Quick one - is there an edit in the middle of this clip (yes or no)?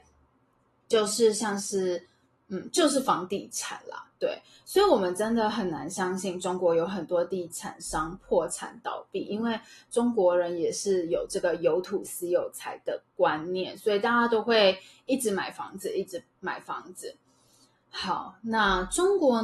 no